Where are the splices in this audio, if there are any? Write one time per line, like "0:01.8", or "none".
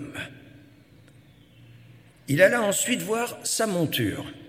none